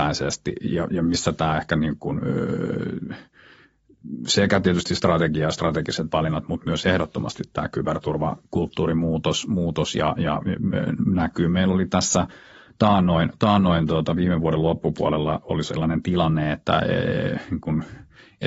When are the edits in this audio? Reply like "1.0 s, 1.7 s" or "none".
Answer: none